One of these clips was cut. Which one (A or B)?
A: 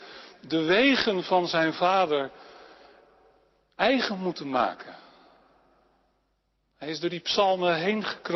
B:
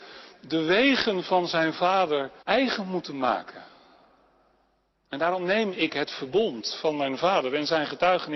B